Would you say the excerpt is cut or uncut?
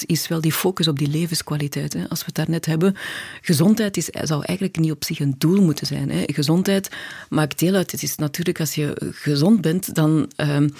uncut